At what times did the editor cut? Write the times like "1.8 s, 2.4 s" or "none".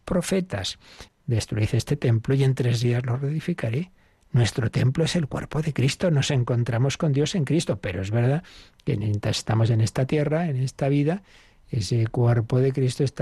1.1 s